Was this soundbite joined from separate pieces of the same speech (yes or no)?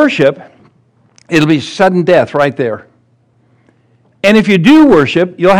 no